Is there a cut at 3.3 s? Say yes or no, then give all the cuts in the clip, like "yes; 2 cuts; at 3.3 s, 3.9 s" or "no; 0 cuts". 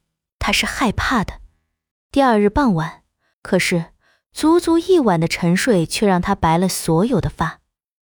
yes; 2 cuts; at 1.9 s, 3.3 s